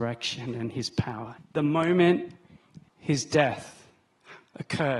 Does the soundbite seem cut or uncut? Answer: cut